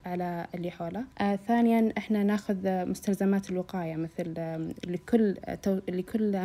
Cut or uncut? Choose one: cut